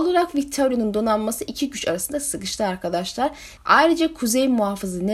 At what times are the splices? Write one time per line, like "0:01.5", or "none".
0:03.6